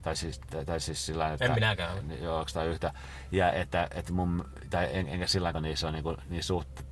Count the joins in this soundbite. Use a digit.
2